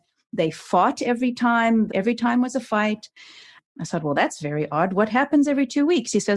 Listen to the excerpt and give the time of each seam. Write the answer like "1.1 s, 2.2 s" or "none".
1.9 s, 3.7 s